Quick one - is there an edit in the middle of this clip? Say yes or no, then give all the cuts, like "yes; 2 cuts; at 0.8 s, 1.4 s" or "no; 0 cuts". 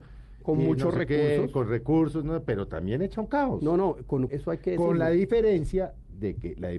yes; 1 cut; at 4.3 s